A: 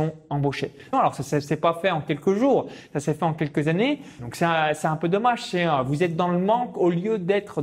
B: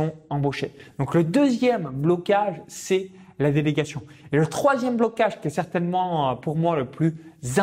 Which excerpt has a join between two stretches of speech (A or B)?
A